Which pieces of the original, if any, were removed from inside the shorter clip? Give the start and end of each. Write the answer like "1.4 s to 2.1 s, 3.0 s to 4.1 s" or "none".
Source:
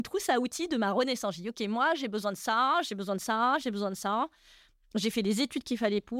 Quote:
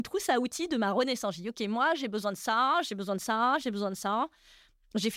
none